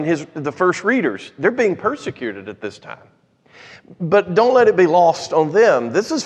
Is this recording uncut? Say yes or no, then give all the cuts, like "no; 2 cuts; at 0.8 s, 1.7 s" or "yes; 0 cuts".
yes; 0 cuts